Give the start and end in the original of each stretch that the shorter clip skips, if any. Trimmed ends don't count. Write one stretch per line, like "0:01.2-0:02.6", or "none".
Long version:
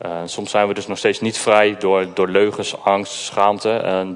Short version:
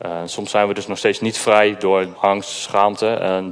0:02.1-0:02.8